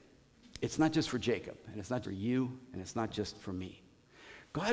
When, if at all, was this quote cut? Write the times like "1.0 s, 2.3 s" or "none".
2.0 s

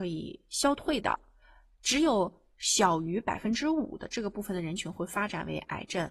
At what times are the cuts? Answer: none

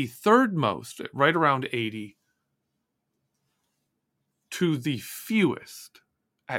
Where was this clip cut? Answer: none

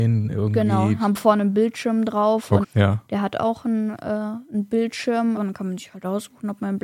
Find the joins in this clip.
2.6 s, 5.4 s

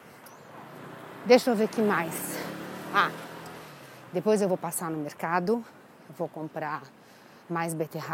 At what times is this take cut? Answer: none

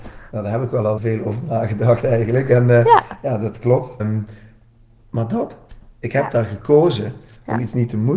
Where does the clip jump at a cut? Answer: 1.0 s, 4.0 s

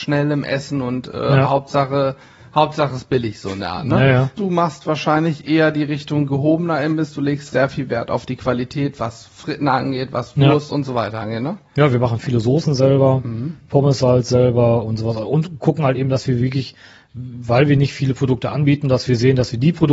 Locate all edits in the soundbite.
4.4 s

